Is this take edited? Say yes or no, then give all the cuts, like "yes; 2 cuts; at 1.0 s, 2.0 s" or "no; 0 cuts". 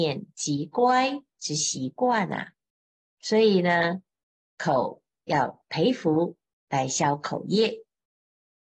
yes; 1 cut; at 3.0 s